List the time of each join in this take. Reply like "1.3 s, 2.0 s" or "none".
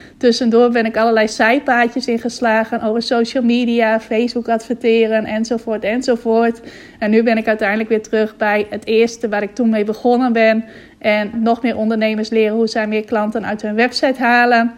11.3 s